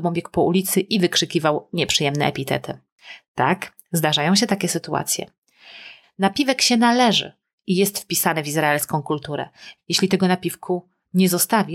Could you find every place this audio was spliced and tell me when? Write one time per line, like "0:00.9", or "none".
0:06.0
0:09.8

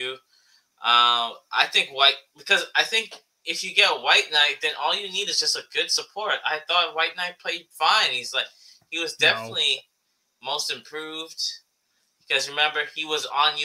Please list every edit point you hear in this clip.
none

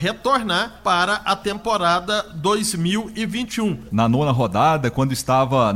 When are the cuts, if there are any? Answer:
0:03.9

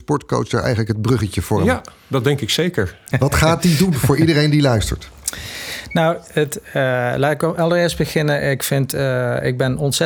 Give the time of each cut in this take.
0:03.1

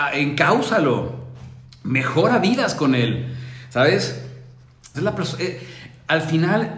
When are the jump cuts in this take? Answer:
0:04.9

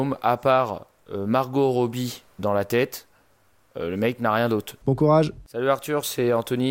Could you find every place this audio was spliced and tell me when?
0:02.4
0:04.8

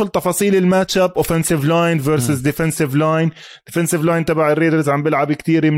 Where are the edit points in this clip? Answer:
none

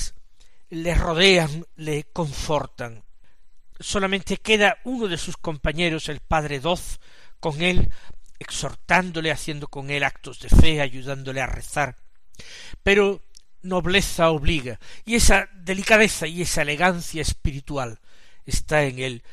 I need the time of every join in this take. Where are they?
0:03.7
0:08.4

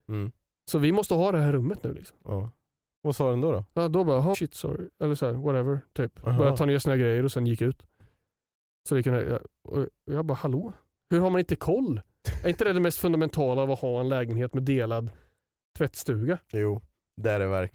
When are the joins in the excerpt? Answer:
0:04.3

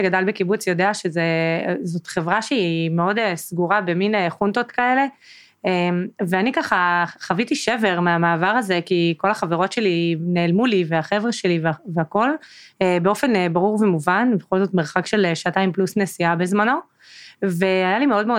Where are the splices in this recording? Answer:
none

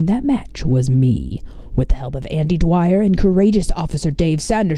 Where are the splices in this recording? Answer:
none

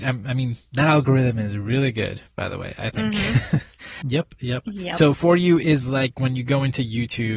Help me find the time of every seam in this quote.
0:04.0

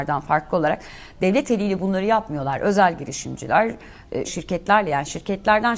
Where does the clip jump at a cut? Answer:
0:04.2

